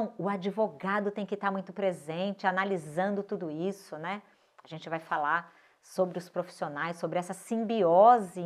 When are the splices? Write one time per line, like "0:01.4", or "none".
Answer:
none